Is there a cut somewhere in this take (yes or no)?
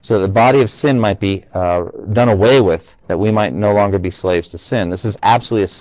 yes